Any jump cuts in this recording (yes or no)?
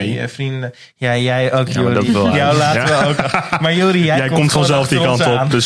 yes